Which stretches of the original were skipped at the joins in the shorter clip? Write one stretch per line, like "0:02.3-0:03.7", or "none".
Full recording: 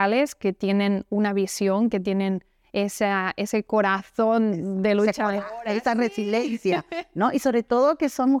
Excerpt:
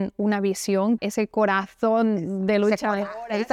0:01.9-0:03.3